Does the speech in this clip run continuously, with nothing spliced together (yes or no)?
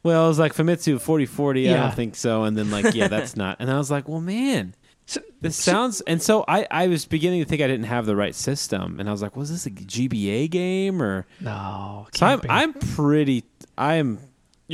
yes